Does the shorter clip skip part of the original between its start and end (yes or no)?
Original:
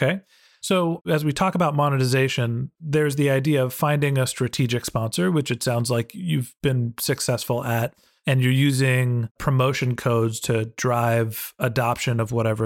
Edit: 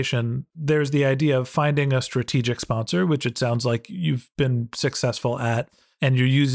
no